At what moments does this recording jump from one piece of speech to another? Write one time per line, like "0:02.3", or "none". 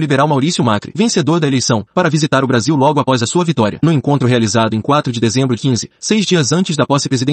0:05.6